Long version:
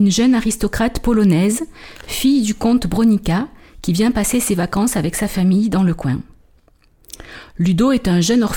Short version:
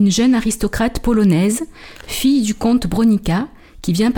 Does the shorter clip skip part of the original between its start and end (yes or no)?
no